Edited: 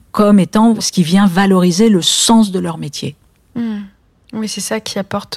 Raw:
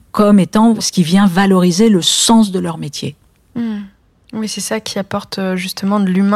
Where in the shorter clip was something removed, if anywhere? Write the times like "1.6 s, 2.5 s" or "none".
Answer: none